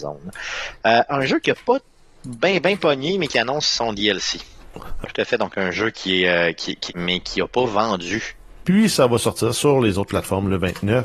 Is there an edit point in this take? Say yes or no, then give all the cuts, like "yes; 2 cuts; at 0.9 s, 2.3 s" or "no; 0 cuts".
yes; 3 cuts; at 5.0 s, 6.9 s, 8.6 s